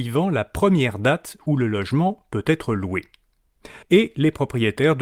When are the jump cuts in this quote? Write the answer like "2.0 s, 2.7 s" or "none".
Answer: 3.8 s